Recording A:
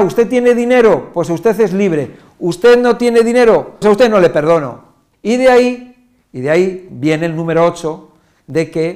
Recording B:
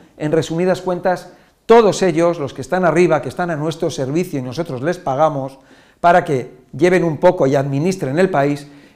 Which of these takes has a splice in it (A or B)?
A